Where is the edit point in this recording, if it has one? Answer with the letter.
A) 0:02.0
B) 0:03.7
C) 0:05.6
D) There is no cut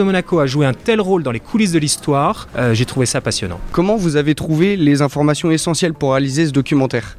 D